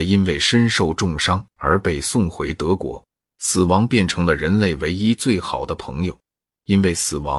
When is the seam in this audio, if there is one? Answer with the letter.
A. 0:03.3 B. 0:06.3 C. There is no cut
A